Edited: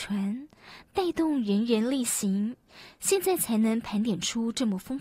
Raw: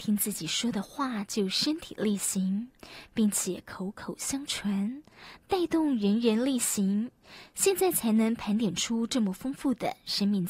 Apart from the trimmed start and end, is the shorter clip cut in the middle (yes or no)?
no